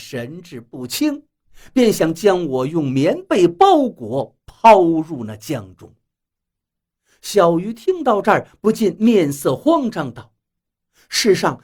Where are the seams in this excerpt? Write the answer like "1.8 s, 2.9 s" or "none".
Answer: none